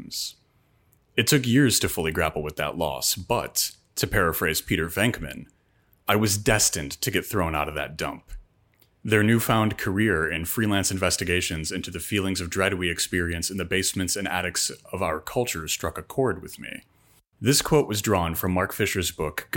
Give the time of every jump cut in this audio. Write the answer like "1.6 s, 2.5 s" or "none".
9.0 s, 17.3 s